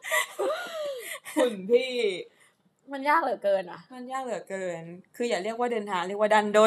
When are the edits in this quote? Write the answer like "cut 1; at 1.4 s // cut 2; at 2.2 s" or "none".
none